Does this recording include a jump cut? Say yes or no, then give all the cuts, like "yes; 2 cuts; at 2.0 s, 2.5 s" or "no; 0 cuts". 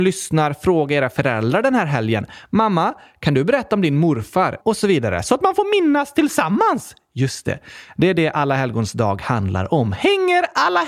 yes; 1 cut; at 4.6 s